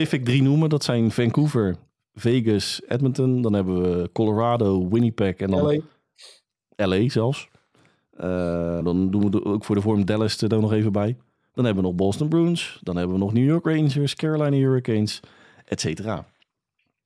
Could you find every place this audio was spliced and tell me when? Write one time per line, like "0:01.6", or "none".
0:08.8